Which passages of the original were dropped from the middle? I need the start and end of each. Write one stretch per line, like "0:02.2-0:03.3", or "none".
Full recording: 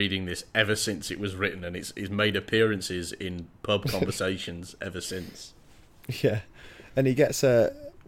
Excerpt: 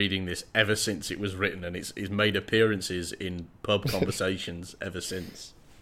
none